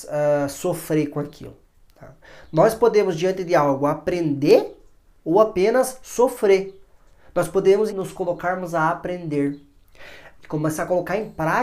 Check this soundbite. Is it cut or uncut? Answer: cut